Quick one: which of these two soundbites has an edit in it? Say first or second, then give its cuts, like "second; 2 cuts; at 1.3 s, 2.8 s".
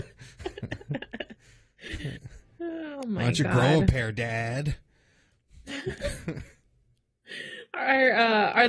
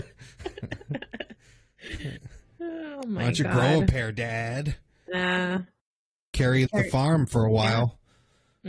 second; 2 cuts; at 5.1 s, 6.7 s